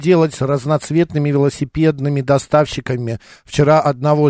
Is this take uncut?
yes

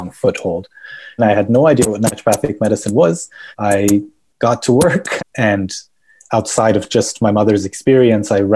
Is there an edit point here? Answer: yes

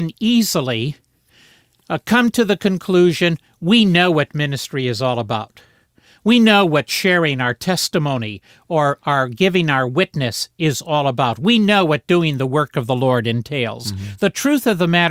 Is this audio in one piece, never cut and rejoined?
yes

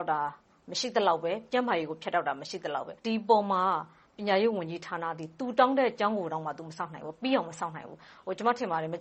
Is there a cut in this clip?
yes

